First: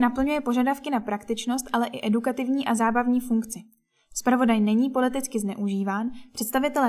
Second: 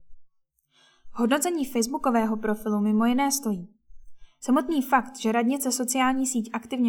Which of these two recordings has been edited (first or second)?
second